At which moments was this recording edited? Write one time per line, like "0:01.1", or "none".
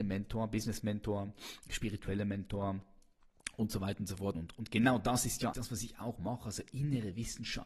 0:04.3
0:05.5